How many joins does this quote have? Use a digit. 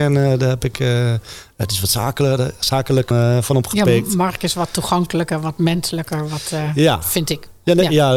1